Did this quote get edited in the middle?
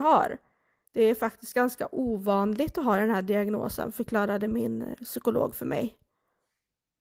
no; 0 cuts

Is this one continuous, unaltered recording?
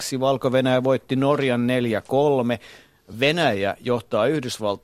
yes; 0 cuts

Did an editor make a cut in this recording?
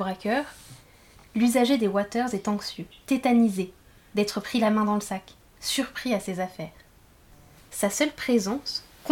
no; 0 cuts

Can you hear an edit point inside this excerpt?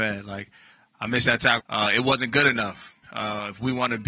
yes; 2 cuts; at 1.6 s, 3.0 s

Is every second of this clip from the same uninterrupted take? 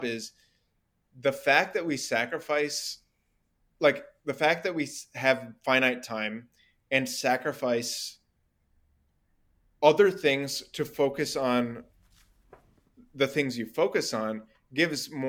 yes; 0 cuts

